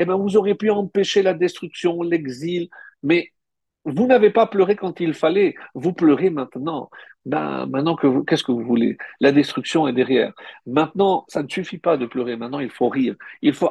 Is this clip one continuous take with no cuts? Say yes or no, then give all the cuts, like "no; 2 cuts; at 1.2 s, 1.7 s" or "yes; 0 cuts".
yes; 0 cuts